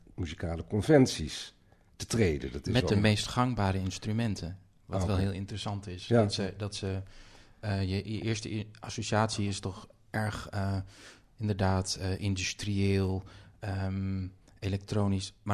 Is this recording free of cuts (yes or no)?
yes